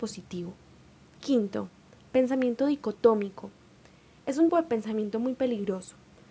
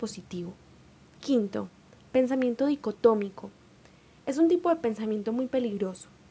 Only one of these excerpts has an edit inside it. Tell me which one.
first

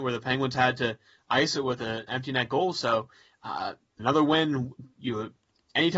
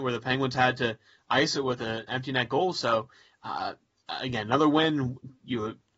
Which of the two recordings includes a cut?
first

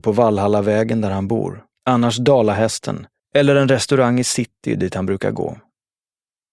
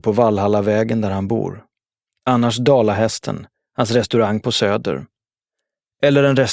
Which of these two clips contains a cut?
first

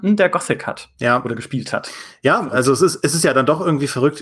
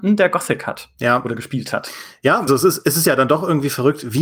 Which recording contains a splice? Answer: second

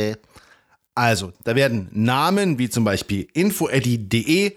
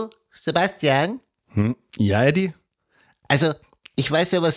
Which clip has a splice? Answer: first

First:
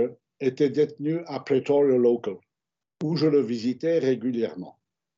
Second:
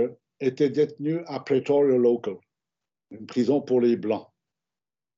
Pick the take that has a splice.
first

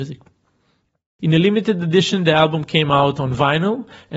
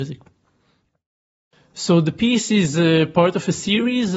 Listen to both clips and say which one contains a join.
first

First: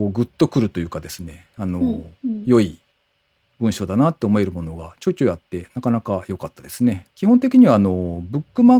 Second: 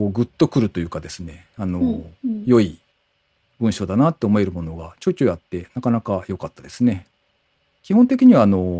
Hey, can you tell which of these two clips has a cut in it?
first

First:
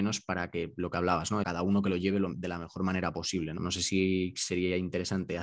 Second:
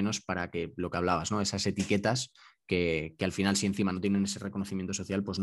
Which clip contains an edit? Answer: first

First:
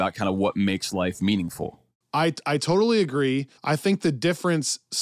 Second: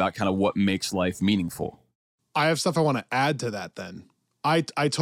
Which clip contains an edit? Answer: first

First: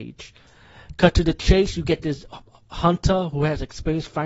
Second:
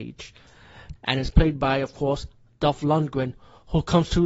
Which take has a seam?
second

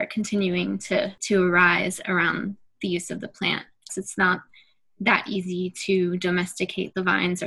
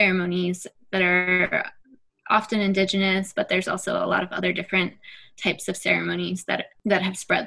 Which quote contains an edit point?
first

